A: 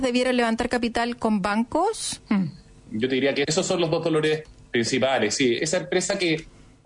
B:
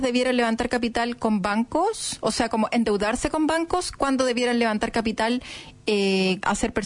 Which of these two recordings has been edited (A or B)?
A